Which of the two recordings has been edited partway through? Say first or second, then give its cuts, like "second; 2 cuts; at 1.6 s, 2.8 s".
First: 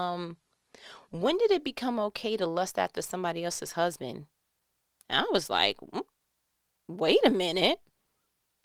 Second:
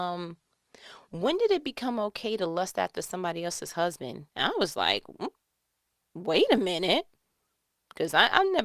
second; 1 cut; at 4.3 s